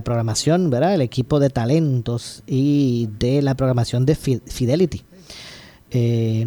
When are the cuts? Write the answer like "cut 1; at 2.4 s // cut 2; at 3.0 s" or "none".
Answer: none